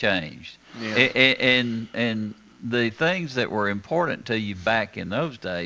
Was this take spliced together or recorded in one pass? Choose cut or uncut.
uncut